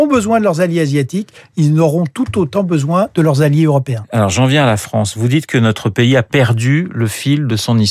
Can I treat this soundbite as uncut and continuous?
yes; 0 cuts

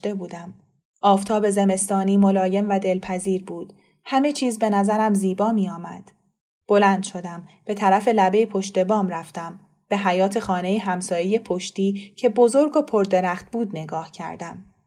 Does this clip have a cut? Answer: no; 0 cuts

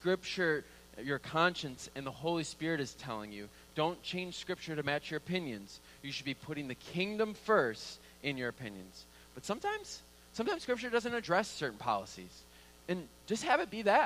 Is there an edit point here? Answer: no; 0 cuts

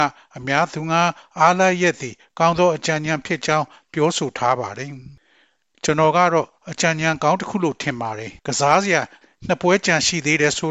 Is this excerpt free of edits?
no; 1 cut; at 8.4 s

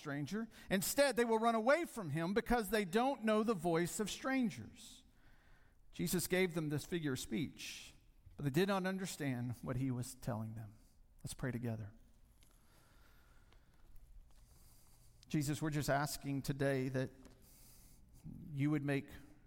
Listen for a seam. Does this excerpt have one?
no; 0 cuts

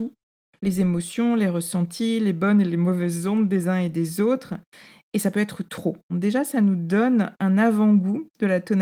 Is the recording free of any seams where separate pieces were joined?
no; 1 cut; at 6.1 s

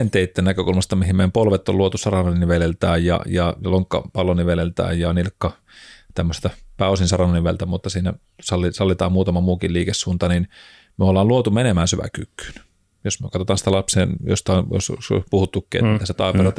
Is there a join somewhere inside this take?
no; 0 cuts

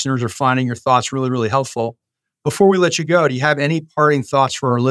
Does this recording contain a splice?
no; 0 cuts

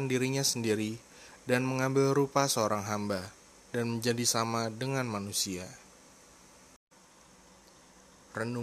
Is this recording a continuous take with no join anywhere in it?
yes; 0 cuts

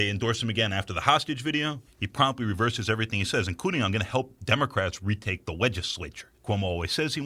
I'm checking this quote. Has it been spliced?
no; 0 cuts

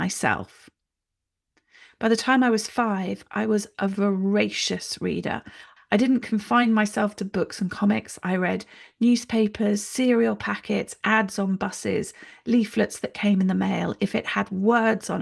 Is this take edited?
yes; 1 cut; at 5.8 s

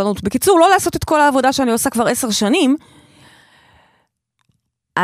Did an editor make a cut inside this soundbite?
no; 0 cuts

